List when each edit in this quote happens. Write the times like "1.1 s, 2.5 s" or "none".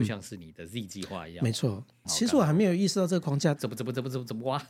2.0 s, 3.6 s